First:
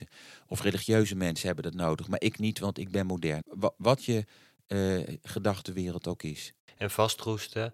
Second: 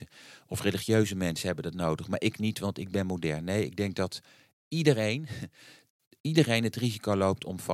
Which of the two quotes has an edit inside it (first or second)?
first